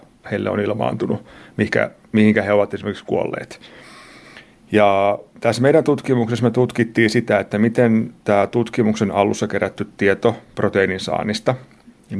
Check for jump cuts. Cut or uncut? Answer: uncut